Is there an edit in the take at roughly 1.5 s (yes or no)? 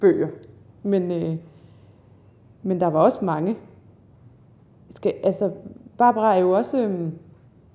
no